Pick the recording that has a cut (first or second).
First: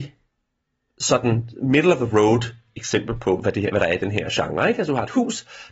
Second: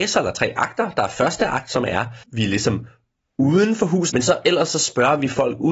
second